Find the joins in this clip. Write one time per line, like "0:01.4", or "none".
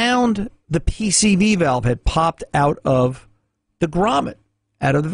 none